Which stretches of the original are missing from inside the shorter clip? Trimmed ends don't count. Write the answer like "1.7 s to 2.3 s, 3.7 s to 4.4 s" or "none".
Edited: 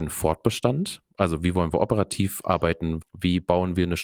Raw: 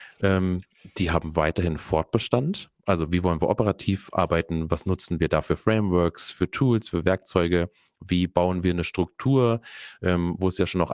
4.7 s to 7.9 s